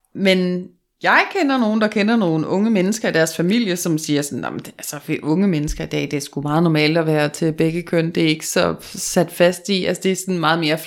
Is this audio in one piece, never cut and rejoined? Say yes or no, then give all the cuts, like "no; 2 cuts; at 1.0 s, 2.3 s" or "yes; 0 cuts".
yes; 0 cuts